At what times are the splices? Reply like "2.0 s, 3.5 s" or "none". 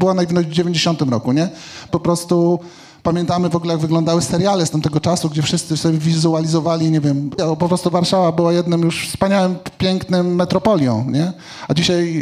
1.9 s, 7.4 s